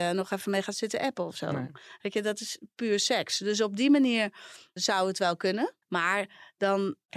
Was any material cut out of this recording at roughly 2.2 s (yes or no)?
no